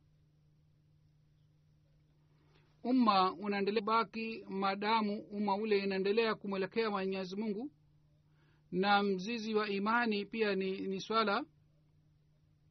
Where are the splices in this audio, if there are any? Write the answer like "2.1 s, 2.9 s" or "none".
none